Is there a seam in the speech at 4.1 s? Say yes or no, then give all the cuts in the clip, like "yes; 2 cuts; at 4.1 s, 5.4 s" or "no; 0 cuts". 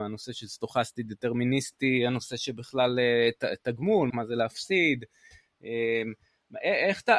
yes; 1 cut; at 4.1 s